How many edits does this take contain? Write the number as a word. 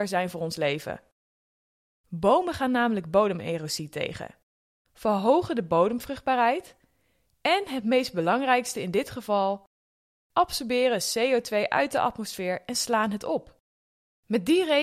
one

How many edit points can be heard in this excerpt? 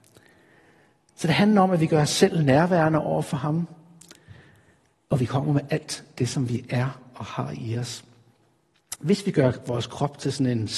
zero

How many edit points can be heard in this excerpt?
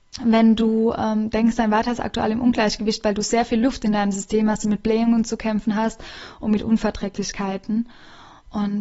zero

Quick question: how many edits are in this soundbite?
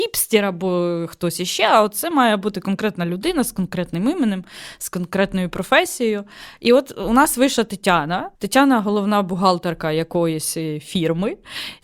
one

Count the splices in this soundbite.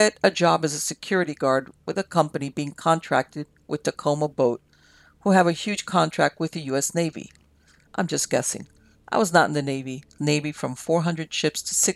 two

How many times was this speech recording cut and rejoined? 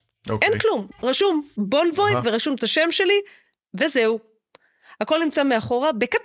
zero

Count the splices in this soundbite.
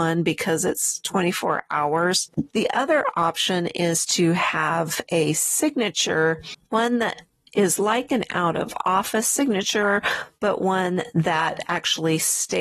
one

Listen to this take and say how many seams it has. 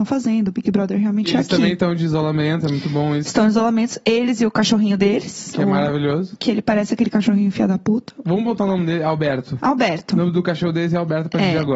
zero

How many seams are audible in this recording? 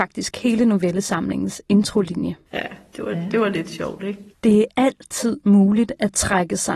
two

